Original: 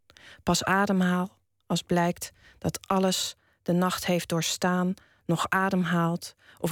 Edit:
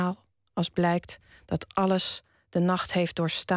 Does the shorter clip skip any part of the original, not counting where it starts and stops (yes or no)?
no